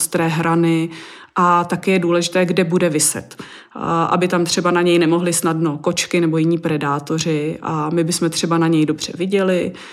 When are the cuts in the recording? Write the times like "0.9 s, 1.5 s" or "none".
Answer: none